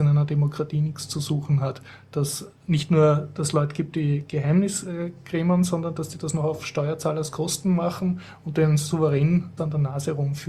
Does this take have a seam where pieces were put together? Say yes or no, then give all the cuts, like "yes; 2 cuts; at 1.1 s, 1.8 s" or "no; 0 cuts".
yes; 1 cut; at 9.6 s